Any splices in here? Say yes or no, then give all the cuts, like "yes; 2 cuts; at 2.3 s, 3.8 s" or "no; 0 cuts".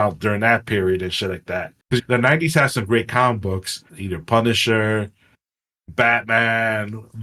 yes; 2 cuts; at 1.8 s, 3.9 s